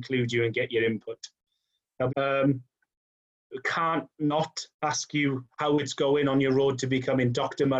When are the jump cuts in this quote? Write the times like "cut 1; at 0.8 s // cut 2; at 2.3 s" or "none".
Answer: cut 1; at 2.1 s // cut 2; at 4.7 s